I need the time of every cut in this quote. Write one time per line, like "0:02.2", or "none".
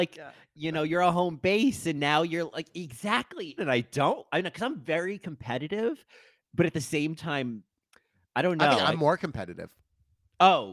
0:03.6

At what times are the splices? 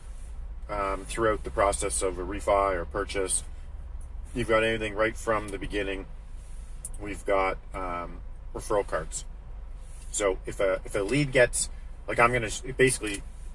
none

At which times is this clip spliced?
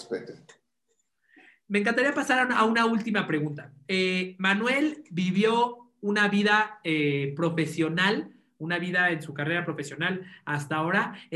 none

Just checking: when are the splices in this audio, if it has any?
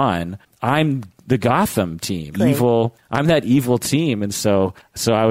0:02.3

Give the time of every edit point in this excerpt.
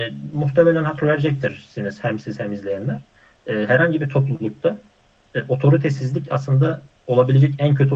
none

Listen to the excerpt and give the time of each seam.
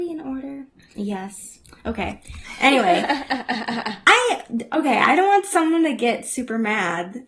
none

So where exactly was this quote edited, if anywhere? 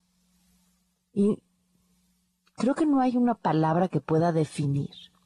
0:01.0

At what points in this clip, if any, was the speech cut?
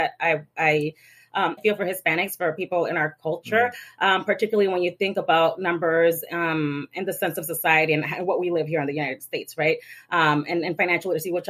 0:01.6

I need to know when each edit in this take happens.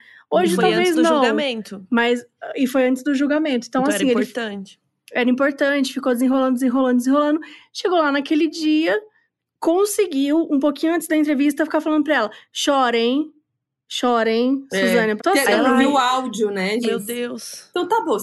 0:15.2
0:16.8

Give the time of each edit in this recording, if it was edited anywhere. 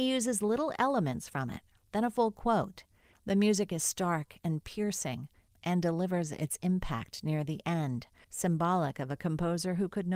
0:03.1
0:08.2

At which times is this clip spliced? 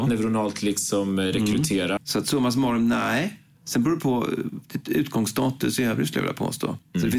0:02.0

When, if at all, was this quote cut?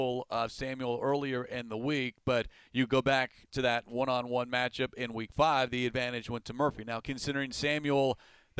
0:07.0

